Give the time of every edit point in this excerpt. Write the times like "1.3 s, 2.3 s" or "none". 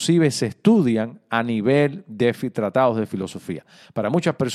none